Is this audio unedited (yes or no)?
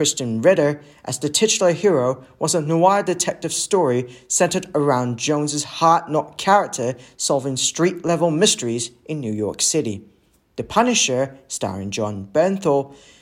yes